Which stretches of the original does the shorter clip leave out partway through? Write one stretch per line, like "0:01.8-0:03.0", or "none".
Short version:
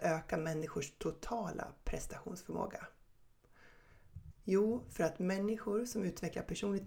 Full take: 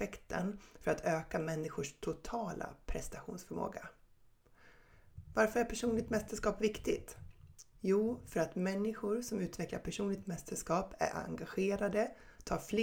0:05.3-0:07.7